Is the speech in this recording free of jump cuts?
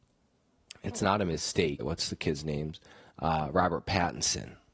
no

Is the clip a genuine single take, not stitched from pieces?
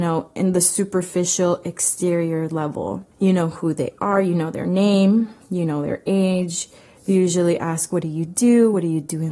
yes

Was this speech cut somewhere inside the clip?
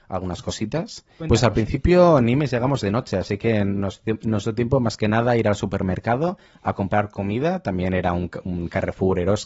yes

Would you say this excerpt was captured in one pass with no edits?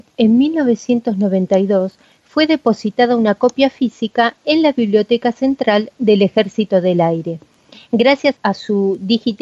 no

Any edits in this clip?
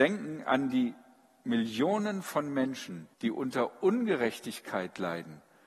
yes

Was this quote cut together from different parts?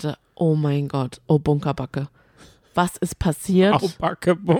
no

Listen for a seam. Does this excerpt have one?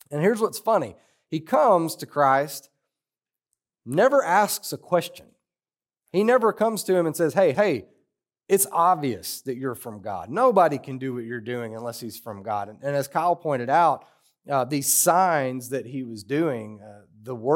yes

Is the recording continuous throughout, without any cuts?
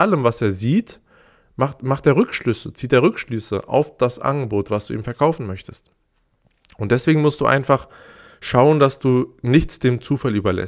yes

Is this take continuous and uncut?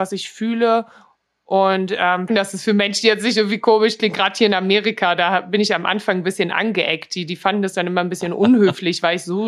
no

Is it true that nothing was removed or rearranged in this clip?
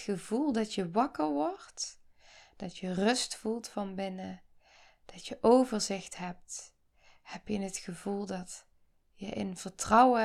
yes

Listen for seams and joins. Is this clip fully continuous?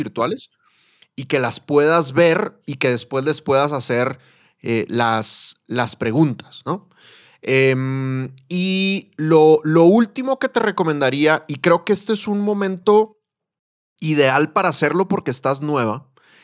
yes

